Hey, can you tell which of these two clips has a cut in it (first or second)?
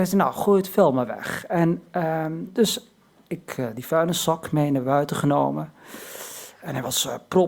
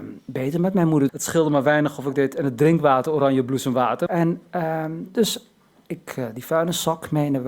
second